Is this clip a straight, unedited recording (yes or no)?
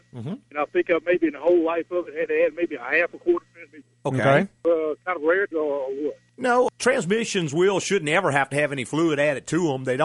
no